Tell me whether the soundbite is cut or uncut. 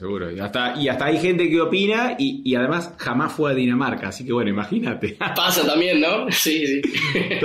uncut